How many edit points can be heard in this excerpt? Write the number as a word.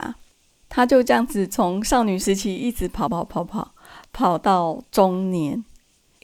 one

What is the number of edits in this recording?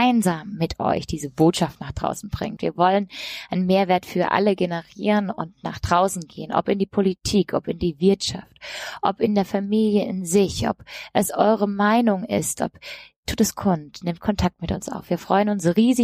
one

